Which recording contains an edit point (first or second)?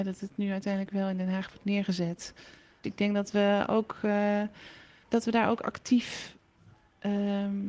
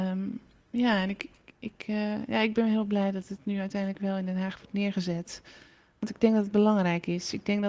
first